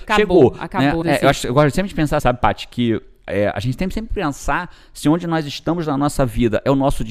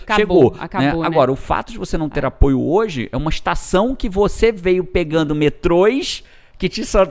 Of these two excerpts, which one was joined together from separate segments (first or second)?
first